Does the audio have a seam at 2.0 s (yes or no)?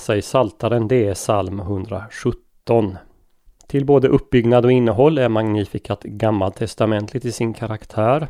no